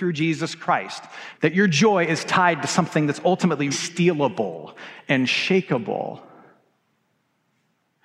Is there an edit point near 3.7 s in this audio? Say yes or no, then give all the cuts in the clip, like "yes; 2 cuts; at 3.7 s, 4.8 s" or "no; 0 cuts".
yes; 2 cuts; at 1.3 s, 3.7 s